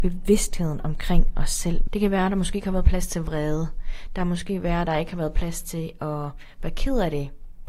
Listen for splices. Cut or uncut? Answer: cut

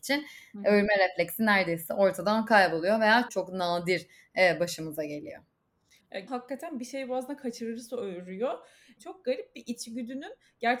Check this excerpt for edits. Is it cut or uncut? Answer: cut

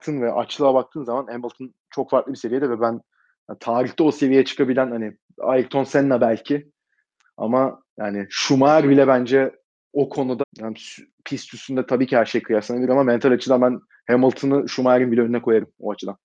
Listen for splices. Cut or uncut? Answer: cut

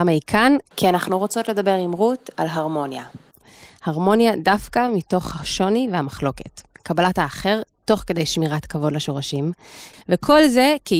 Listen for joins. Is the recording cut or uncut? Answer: cut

